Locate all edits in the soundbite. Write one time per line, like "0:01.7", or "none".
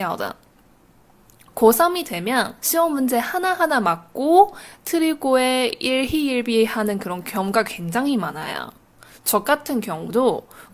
0:01.5